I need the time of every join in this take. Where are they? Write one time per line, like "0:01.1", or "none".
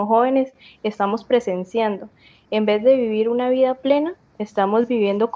none